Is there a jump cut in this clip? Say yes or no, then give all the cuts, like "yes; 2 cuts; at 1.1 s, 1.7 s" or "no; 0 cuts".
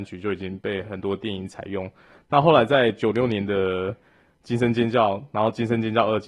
no; 0 cuts